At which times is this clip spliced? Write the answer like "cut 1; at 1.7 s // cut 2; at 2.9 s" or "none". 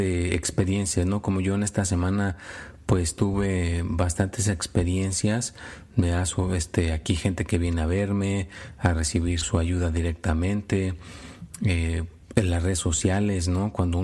cut 1; at 9.4 s

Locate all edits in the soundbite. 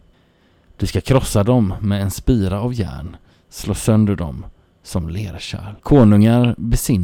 cut 1; at 5.8 s

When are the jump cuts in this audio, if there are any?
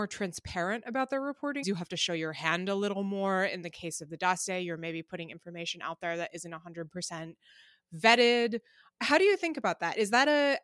cut 1; at 1.6 s

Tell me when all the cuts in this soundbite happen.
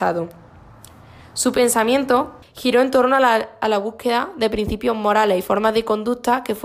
cut 1; at 2.4 s

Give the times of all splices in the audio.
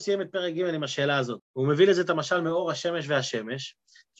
cut 1; at 1.4 s

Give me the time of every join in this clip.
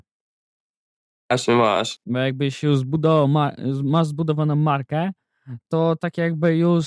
cut 1; at 2.0 s

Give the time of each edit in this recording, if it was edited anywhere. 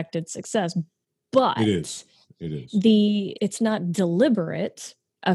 cut 1; at 3.4 s

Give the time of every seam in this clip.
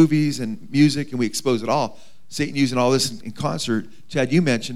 cut 1; at 3.2 s

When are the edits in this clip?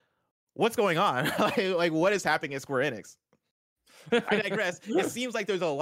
cut 1; at 4.1 s

